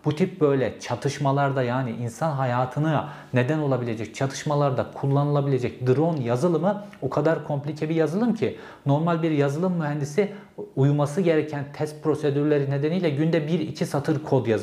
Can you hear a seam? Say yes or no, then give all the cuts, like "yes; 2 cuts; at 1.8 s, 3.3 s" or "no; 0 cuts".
no; 0 cuts